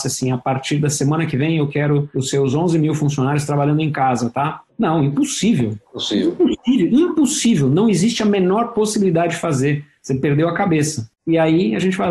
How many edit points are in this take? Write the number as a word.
one